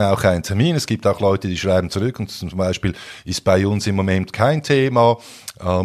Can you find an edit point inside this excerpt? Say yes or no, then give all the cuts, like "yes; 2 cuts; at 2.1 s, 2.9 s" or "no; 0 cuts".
no; 0 cuts